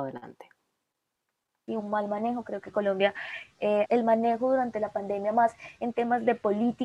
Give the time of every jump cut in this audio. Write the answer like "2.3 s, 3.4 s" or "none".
1.7 s, 3.9 s

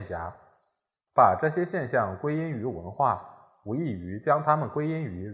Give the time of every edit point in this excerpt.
1.1 s

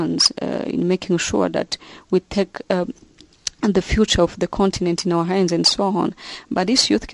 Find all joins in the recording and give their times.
none

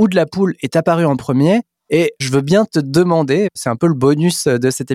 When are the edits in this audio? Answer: none

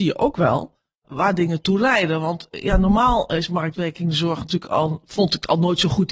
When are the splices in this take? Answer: 1.0 s

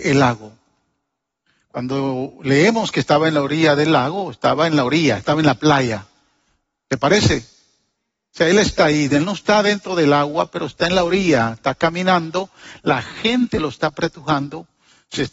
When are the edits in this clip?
none

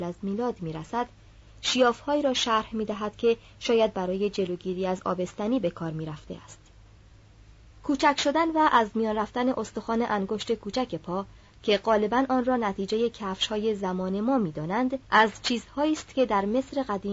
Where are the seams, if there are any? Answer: 7.7 s, 15.1 s

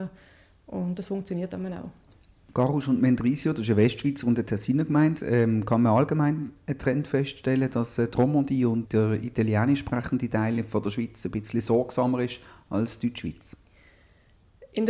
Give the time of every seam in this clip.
8.9 s

